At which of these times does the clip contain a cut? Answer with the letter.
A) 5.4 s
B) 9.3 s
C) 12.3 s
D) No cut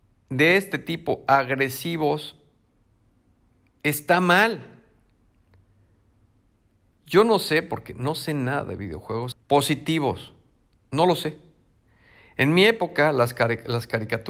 B